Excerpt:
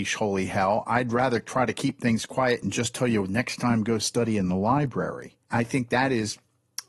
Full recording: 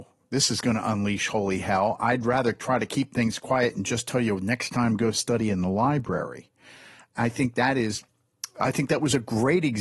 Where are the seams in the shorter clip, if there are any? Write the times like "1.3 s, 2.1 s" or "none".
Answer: 5.4 s

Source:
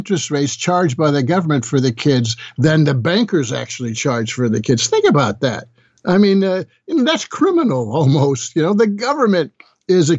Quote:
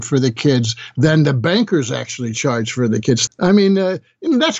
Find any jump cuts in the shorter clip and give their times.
3.3 s

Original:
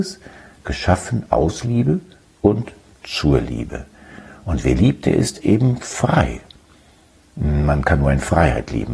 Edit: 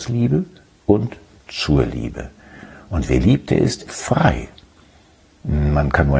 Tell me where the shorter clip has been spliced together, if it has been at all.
3.9 s

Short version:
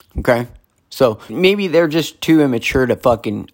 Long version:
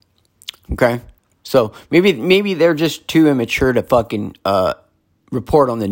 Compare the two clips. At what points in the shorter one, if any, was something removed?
1.3 s

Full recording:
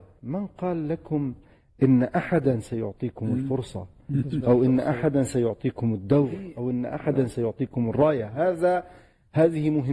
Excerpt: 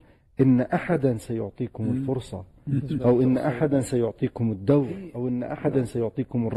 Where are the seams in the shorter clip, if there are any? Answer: none

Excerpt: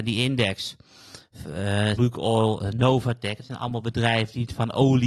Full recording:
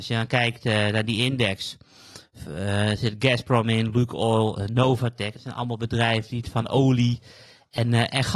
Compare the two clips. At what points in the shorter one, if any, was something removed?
2.0 s

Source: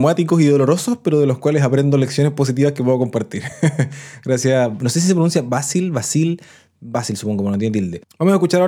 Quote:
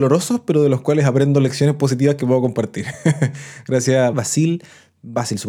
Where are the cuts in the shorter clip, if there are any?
4.1 s

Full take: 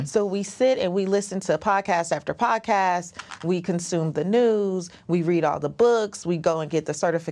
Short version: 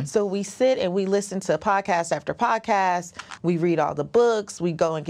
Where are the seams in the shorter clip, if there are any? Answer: 3.4 s

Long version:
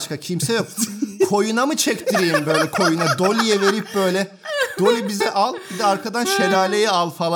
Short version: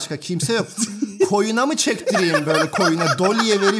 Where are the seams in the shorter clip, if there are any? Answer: none

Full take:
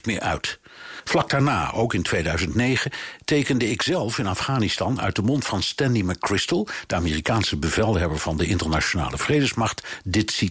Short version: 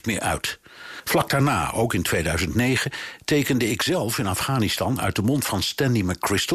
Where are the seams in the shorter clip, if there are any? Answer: none

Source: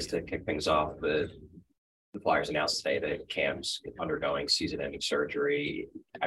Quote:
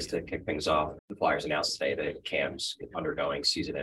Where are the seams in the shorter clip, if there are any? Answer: 1.0 s

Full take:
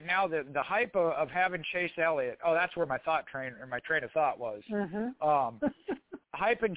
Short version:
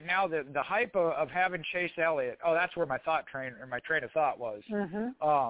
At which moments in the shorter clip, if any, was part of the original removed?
none

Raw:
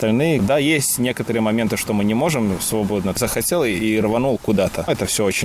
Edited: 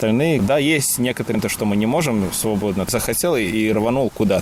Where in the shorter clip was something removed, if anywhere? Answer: 1.3 s

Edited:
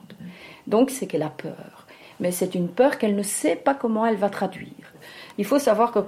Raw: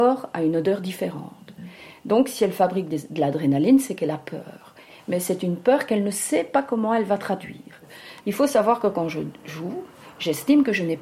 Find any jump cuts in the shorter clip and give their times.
0.9 s

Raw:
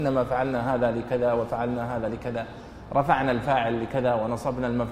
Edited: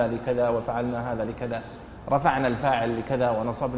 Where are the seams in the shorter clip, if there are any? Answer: none

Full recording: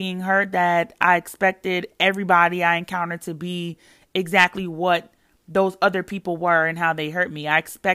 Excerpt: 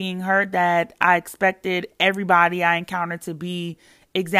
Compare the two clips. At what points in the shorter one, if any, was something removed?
none

